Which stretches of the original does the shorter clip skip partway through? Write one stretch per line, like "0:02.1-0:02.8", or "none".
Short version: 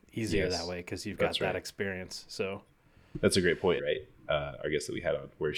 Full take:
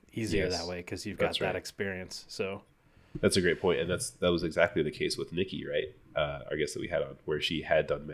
0:03.8-0:05.6